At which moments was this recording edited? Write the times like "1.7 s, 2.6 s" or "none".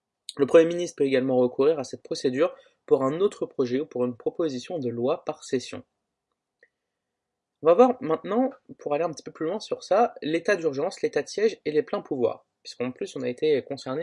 none